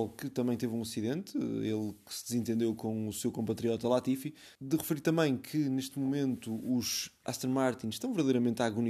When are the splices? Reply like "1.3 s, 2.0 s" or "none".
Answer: 4.6 s